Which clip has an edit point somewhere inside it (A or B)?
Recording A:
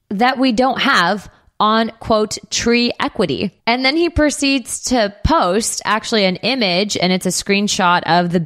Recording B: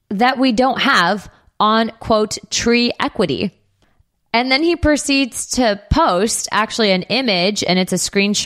A